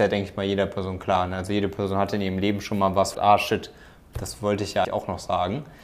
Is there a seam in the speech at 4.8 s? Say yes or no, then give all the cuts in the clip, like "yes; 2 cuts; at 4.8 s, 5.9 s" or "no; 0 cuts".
yes; 2 cuts; at 3.1 s, 4.8 s